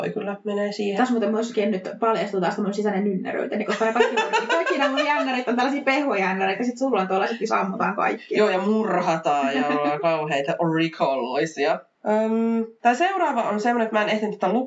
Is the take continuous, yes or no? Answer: yes